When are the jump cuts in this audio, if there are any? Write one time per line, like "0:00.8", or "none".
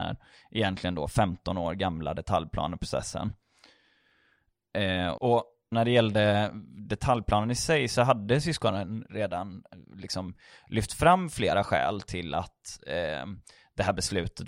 0:05.2

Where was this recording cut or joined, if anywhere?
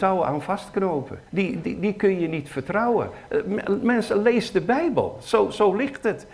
0:01.3

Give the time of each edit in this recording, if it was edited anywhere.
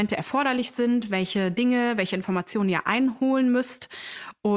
none

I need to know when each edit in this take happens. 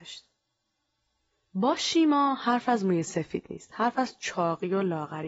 none

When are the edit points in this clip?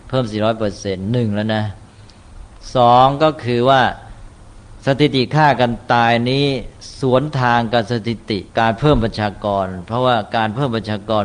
0:08.5

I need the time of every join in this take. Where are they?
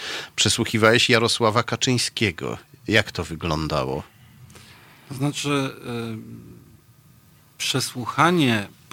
none

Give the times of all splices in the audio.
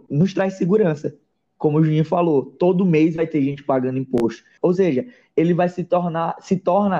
0:04.6

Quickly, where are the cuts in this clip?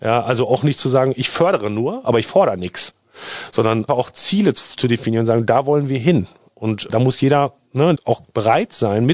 0:03.9
0:06.9
0:08.0

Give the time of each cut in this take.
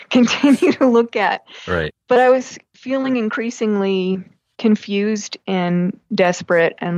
none

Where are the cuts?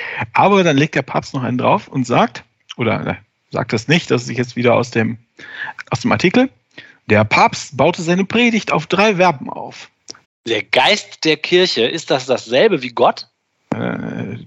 0:05.8
0:10.2

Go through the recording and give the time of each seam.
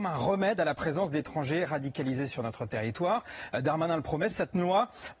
0:04.3

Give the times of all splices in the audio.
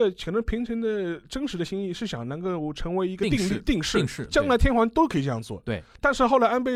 none

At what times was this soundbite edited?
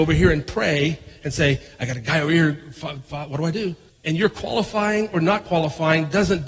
0:03.9

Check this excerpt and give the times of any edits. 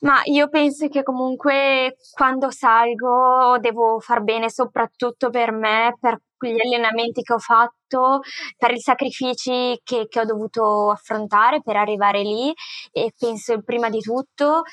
0:13.1

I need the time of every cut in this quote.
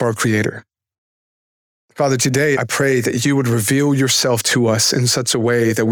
0:02.6

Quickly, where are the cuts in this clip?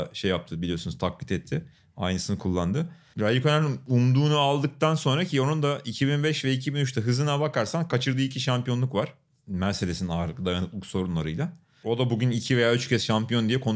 none

